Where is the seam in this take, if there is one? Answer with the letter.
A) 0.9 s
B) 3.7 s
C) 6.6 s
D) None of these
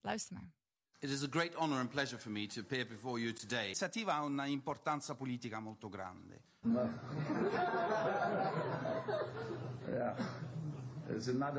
C